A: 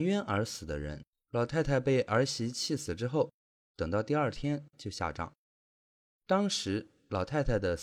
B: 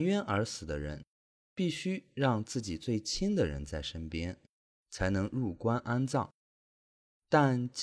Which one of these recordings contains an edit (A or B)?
A